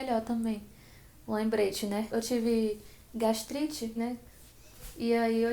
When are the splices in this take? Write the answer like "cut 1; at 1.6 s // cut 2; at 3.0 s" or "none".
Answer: cut 1; at 2.1 s // cut 2; at 4.0 s